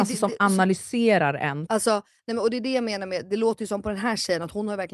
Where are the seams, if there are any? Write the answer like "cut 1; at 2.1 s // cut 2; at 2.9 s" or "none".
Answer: cut 1; at 1.7 s